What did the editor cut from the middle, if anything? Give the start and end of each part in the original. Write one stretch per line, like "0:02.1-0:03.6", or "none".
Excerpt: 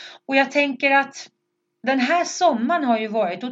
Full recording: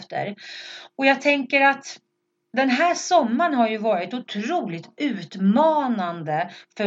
none